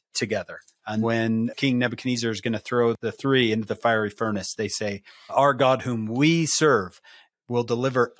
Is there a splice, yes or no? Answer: yes